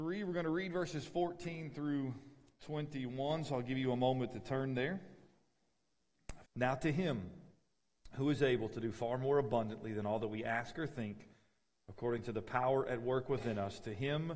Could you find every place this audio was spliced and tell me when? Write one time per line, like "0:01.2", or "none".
0:06.4